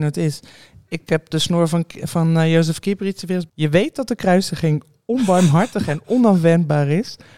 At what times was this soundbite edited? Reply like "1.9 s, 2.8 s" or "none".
3.5 s